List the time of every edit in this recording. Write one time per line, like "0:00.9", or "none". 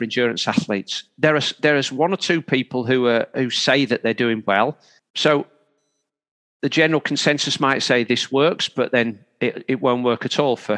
0:05.0